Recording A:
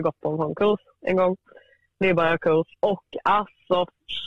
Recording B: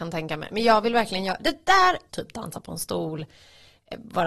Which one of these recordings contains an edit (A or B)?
B